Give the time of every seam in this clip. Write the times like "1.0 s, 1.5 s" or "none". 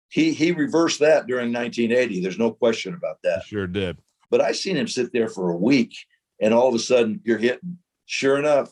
4.2 s, 7.2 s

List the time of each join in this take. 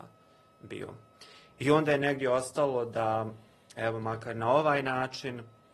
1.5 s

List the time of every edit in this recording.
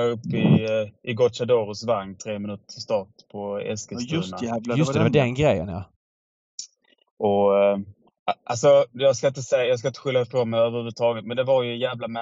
none

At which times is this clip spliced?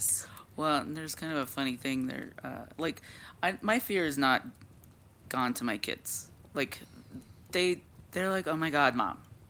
2.7 s, 5.2 s

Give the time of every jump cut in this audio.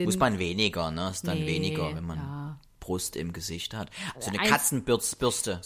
4.1 s

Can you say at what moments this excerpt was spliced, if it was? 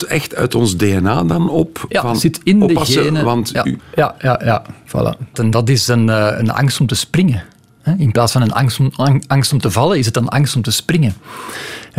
3.8 s, 5.3 s

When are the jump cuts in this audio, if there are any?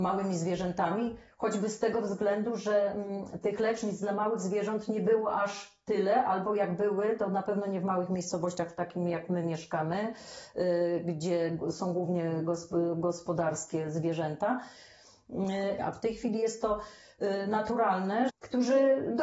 15.8 s, 18.3 s

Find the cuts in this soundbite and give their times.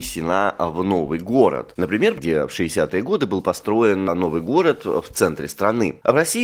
2.2 s

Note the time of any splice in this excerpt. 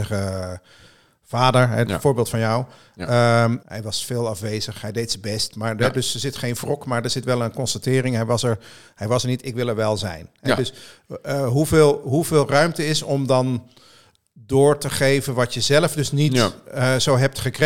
3.6 s

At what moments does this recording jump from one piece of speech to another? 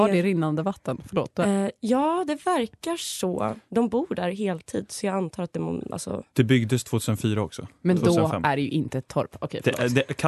none

